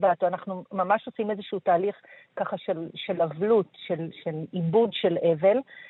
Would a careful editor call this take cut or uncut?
uncut